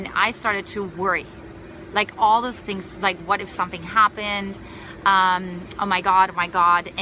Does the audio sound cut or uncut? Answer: cut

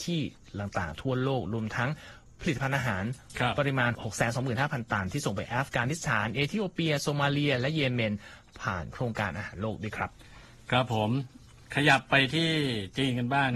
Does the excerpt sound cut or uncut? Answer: cut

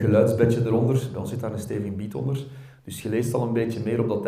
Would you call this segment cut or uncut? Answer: uncut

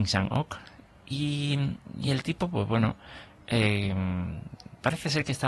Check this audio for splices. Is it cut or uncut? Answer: uncut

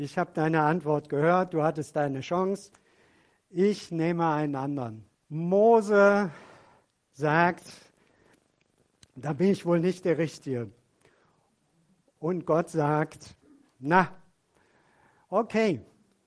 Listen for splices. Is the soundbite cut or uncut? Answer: cut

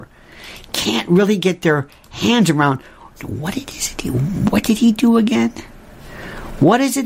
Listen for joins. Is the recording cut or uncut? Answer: uncut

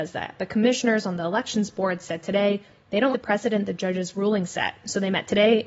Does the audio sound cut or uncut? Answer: cut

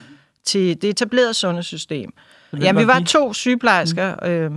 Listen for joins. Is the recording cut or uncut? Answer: cut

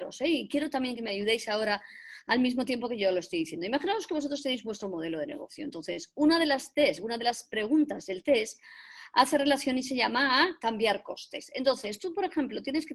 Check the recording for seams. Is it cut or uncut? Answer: uncut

